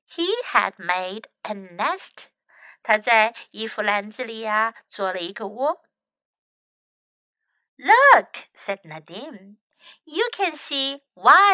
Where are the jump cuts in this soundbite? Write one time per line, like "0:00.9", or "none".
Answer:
none